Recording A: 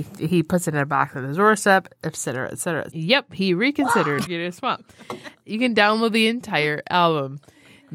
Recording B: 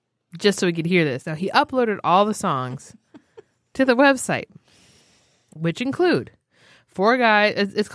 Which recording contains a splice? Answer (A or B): A